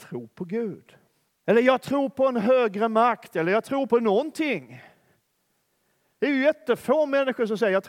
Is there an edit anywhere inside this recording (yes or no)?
yes